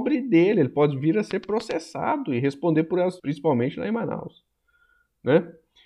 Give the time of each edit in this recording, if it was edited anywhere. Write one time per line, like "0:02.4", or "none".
0:03.2